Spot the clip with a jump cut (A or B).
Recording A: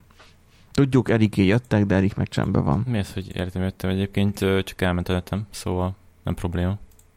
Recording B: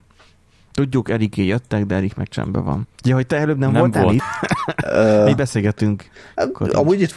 B